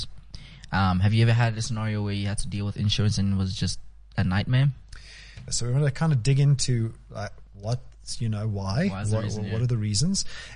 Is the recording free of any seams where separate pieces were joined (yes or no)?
no